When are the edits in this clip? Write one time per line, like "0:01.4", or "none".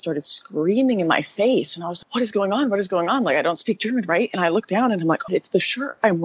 0:02.0
0:05.3